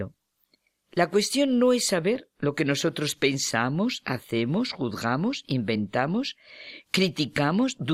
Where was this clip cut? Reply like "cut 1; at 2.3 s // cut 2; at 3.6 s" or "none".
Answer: none

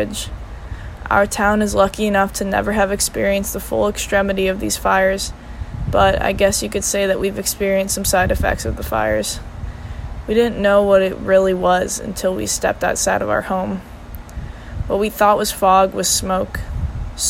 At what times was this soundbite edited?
cut 1; at 10.3 s

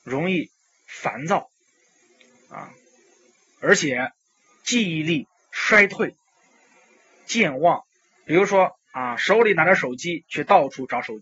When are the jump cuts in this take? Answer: none

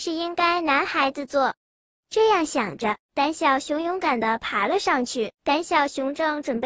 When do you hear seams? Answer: cut 1; at 5.3 s

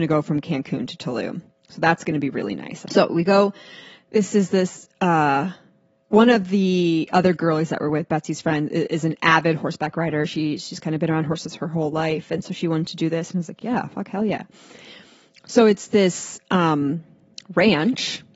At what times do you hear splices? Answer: cut 1; at 2.8 s

